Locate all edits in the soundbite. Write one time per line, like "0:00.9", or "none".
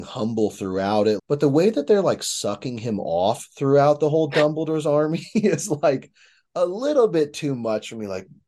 0:01.2